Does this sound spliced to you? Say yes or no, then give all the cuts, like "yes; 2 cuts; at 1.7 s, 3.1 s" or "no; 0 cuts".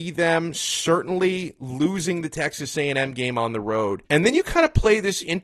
yes; 1 cut; at 4.0 s